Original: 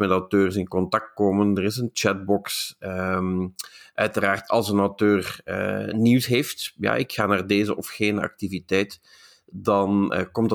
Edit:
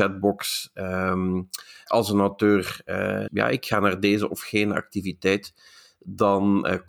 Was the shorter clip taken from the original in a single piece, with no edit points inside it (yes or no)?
no